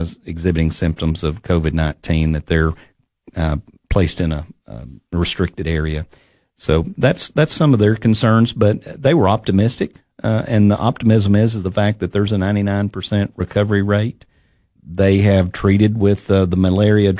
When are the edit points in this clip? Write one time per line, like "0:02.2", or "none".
0:14.8